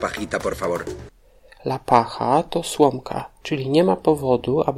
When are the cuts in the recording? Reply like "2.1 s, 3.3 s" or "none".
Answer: 3.4 s